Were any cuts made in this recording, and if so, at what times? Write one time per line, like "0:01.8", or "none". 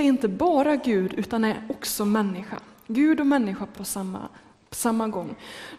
none